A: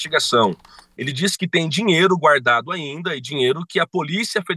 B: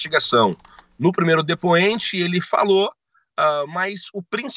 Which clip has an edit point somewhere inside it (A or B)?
A